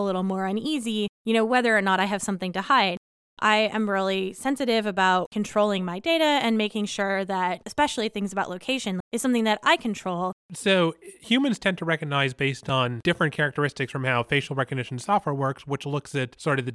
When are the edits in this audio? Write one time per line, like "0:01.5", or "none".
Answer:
0:09.0
0:10.4